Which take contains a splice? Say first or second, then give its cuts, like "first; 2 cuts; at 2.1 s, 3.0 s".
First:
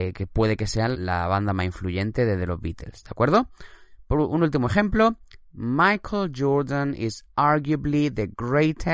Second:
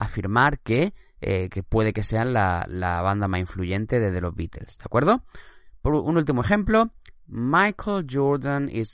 first; 1 cut; at 0.9 s